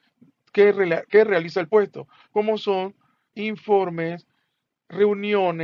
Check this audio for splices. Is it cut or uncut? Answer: cut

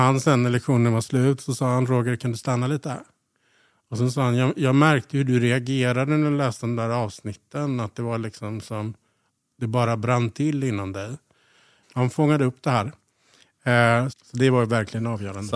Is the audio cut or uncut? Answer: cut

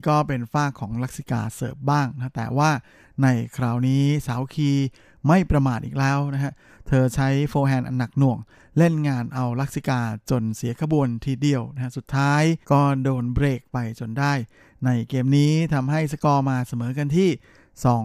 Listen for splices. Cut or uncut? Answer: cut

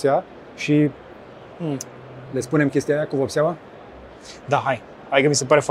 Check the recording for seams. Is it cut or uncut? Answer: uncut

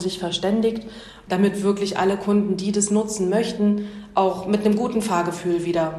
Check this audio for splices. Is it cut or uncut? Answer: uncut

